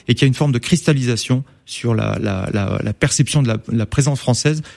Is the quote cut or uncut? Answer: uncut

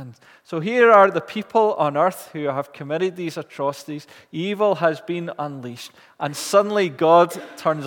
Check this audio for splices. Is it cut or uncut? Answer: uncut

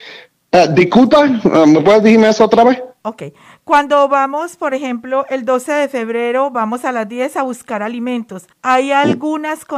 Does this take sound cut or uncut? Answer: cut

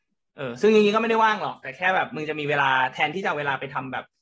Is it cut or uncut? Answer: uncut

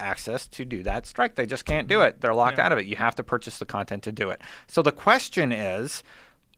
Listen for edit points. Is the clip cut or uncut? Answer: uncut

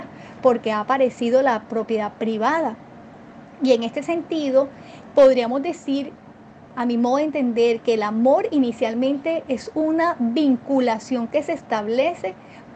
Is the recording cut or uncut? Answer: uncut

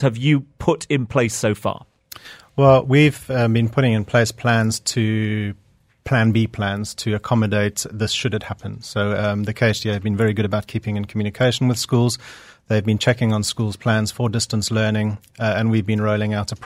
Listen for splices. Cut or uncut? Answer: uncut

